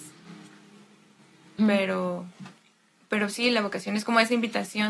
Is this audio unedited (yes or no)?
no